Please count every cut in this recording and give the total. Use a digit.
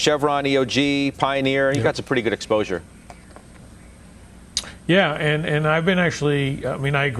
0